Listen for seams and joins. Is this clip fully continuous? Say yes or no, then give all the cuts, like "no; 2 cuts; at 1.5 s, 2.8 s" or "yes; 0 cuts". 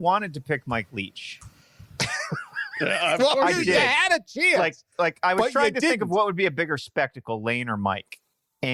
yes; 0 cuts